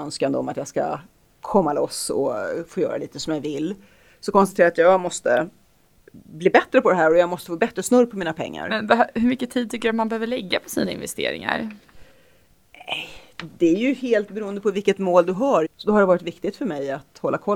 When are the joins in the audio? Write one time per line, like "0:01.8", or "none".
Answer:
0:15.6